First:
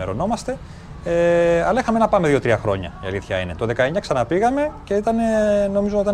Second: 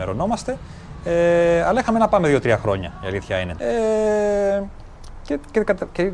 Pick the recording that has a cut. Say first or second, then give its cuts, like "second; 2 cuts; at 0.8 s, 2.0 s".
second; 1 cut; at 3.6 s